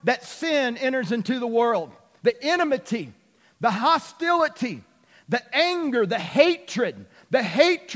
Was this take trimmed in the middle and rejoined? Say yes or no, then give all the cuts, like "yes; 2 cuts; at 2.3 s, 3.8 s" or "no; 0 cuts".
yes; 1 cut; at 2.2 s